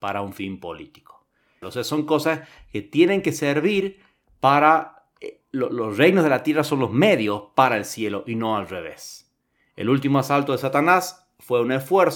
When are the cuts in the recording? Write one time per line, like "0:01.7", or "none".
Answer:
0:01.6